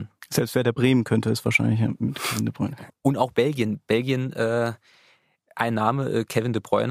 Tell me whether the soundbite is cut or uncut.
cut